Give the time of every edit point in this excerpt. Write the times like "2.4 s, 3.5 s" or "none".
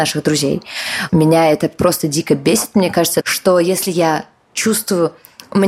1.1 s, 3.2 s